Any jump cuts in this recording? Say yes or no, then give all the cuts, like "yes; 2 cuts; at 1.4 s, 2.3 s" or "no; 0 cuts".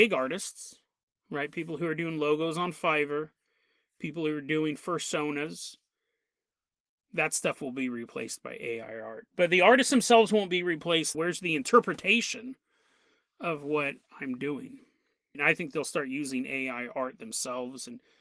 yes; 2 cuts; at 11.1 s, 15.3 s